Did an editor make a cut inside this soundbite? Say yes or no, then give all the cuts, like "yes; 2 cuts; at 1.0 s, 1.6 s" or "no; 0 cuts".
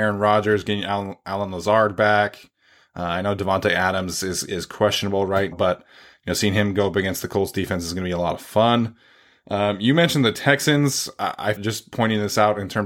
yes; 2 cuts; at 5.5 s, 11.6 s